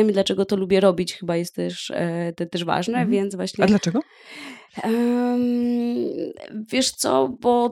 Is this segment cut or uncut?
uncut